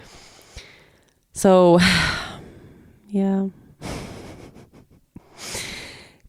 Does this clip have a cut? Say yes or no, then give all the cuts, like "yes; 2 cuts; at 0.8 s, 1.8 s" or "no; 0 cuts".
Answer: no; 0 cuts